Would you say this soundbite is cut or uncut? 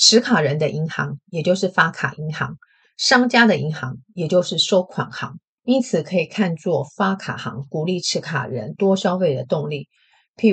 cut